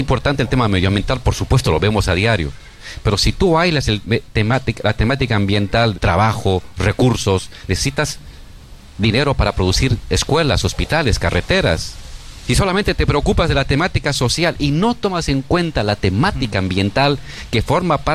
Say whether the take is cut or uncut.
cut